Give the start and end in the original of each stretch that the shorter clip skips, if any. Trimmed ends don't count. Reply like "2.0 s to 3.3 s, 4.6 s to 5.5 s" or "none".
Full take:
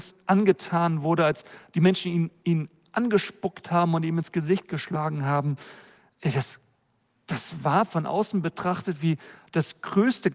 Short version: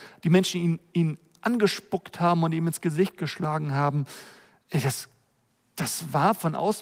none